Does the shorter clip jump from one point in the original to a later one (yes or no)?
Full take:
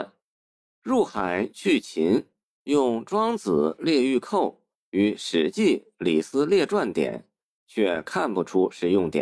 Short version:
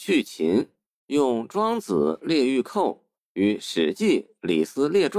no